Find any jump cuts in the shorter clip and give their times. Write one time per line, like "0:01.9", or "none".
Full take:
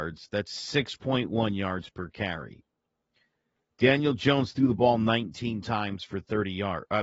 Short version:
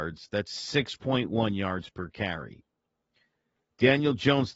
none